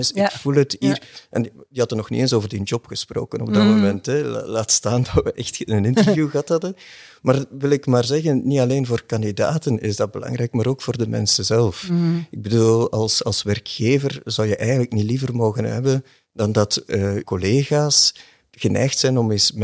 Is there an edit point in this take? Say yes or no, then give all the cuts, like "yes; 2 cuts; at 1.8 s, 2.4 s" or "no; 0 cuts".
yes; 1 cut; at 17.2 s